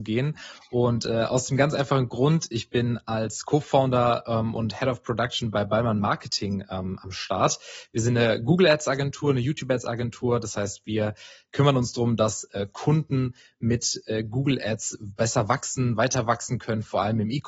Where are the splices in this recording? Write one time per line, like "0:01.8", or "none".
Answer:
none